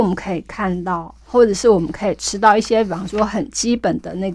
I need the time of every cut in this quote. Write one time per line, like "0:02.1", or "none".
none